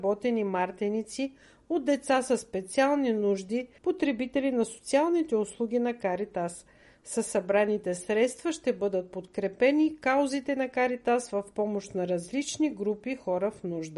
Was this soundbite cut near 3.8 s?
yes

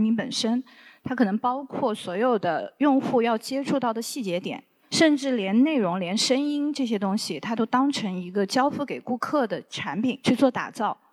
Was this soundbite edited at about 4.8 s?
no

